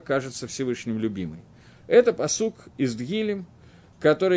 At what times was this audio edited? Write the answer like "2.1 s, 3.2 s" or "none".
1.8 s